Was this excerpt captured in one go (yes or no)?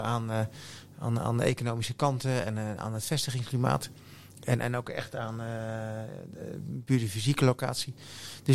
yes